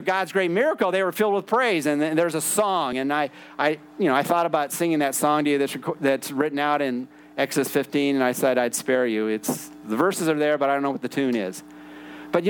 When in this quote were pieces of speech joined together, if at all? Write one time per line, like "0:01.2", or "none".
none